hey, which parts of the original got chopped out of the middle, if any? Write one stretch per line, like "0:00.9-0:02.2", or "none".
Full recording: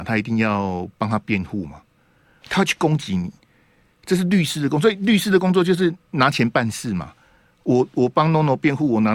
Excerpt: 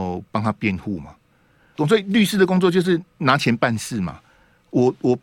0:02.4-0:04.7

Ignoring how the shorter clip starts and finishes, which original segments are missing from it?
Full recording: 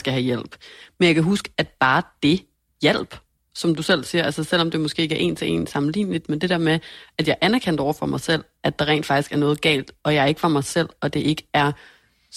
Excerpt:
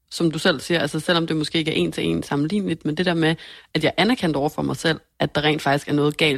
none

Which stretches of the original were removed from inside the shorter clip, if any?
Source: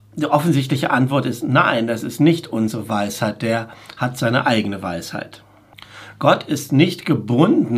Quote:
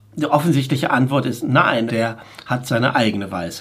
0:01.9-0:03.4

